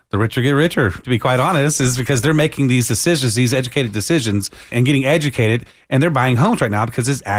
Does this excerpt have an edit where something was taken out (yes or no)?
yes